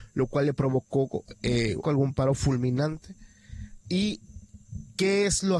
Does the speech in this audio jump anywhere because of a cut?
yes; 1 cut; at 1.8 s

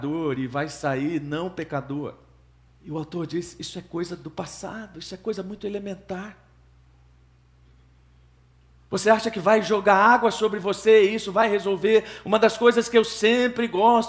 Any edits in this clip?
yes; 1 cut; at 2.7 s

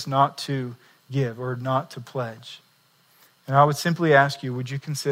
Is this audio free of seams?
yes; 0 cuts

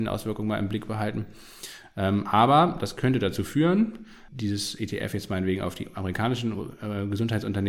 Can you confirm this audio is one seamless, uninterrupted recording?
no; 1 cut; at 4.3 s

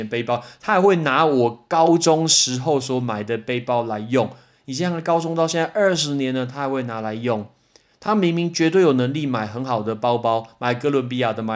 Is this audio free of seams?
yes; 0 cuts

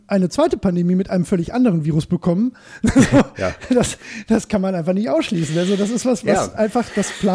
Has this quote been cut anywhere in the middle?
no; 0 cuts

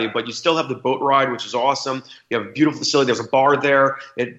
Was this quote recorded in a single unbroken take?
yes; 0 cuts

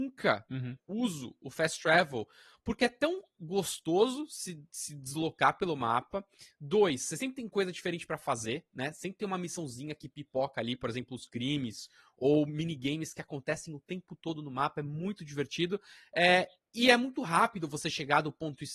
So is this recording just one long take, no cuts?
yes; 0 cuts

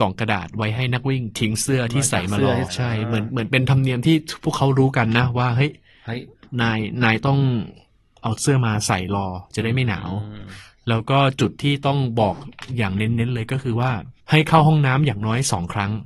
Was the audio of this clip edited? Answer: yes; 2 cuts; at 2.7 s, 14.2 s

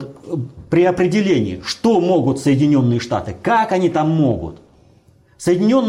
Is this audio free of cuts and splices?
yes; 0 cuts

